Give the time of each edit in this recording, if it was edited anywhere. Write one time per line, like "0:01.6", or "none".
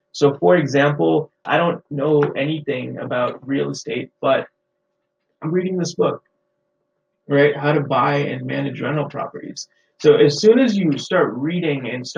0:01.5